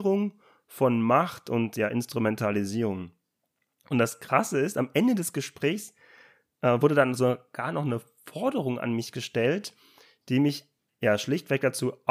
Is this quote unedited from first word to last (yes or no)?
yes